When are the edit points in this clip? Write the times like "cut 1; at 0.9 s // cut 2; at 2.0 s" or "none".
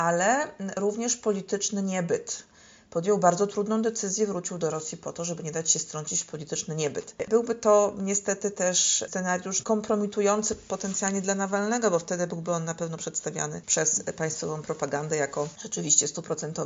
cut 1; at 7.2 s // cut 2; at 9.6 s